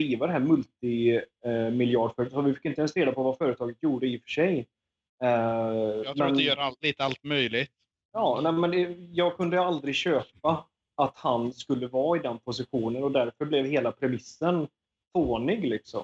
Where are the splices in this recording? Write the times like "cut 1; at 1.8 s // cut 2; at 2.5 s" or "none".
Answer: none